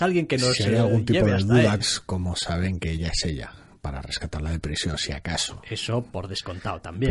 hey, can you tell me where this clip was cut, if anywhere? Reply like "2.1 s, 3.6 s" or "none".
1.8 s